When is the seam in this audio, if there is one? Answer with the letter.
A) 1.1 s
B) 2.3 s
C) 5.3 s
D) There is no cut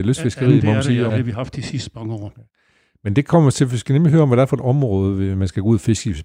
A